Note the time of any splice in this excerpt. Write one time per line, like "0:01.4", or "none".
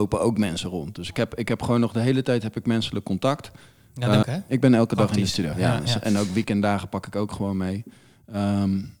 0:04.2
0:05.5